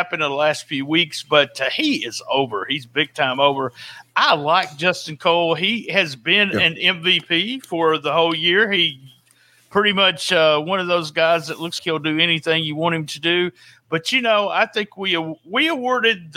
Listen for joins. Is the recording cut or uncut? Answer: cut